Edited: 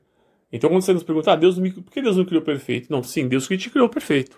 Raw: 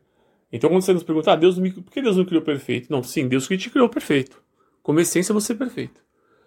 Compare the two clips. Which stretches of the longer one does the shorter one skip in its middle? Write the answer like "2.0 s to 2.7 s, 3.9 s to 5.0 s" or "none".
none